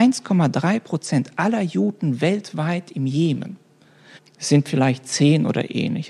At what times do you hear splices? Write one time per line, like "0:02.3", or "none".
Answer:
0:04.2